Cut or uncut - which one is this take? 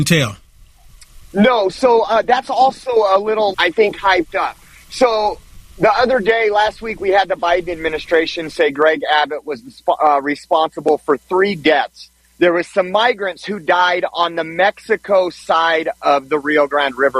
cut